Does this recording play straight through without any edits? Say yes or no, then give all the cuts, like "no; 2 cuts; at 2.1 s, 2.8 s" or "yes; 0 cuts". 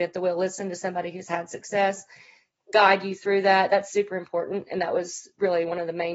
yes; 0 cuts